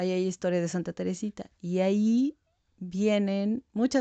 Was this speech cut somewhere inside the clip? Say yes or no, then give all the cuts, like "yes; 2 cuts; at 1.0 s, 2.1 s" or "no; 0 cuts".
no; 0 cuts